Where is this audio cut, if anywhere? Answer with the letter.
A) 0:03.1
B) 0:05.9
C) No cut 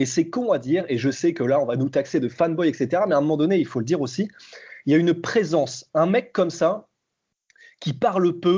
C